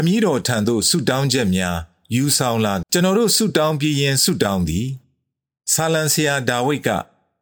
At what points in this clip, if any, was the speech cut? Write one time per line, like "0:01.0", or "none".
0:02.8